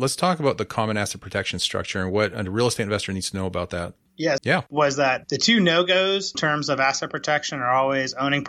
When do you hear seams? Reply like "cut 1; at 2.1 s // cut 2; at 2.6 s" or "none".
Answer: cut 1; at 4.4 s // cut 2; at 6.3 s